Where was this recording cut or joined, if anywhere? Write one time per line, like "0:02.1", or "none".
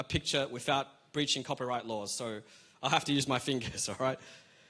none